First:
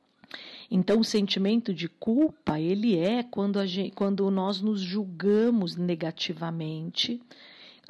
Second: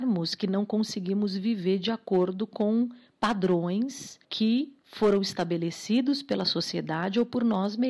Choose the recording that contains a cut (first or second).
second